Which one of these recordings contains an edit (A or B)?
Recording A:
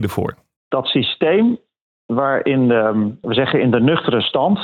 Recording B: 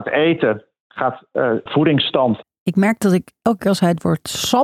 B